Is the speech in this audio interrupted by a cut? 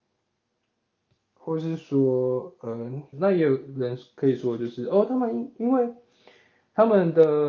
yes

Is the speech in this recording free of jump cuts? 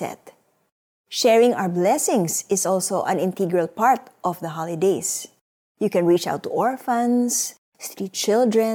yes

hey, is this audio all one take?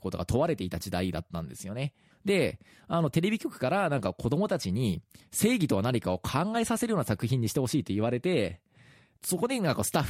no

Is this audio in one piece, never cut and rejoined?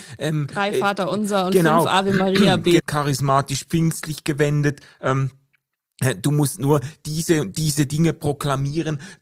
no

